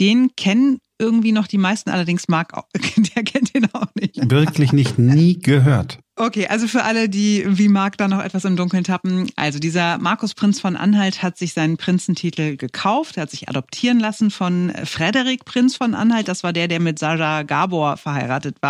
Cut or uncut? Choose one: uncut